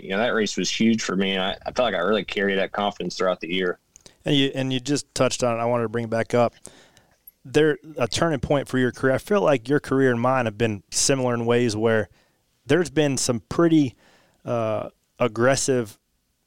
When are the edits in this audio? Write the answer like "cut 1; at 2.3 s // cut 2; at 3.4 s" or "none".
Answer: cut 1; at 10.9 s